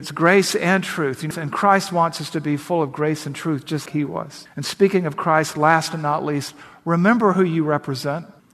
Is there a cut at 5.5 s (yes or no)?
no